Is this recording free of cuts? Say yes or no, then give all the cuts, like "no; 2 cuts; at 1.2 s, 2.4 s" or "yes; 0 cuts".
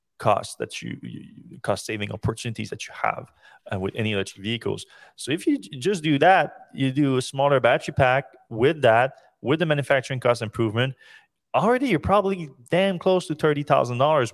yes; 0 cuts